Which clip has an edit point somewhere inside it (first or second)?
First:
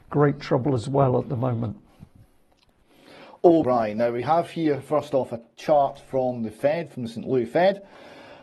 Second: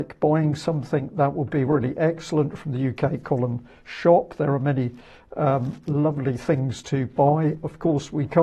first